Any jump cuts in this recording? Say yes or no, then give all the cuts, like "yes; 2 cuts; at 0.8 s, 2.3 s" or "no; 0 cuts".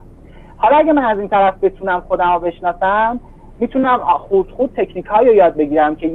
no; 0 cuts